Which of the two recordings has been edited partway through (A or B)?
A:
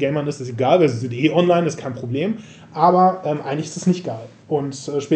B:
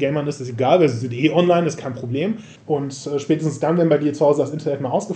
B